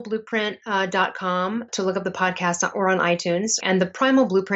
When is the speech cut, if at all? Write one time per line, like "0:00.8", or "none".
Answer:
0:01.7
0:03.6